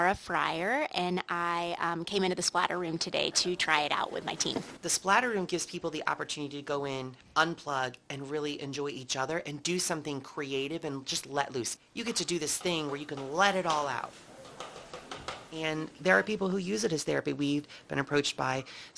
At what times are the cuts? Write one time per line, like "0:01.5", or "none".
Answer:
0:04.8